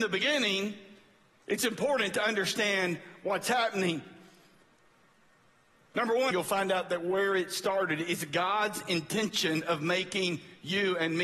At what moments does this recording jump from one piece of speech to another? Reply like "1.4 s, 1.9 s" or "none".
6.3 s